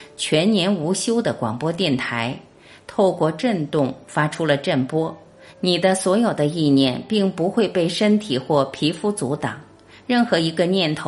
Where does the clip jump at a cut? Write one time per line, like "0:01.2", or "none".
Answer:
none